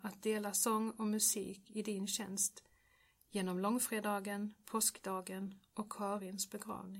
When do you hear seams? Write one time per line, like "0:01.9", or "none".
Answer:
none